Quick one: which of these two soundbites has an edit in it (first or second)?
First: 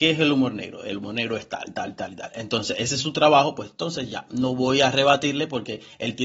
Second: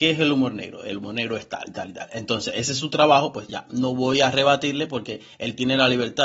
second